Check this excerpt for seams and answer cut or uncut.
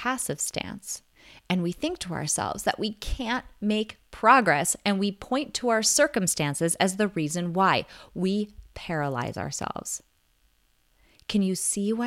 uncut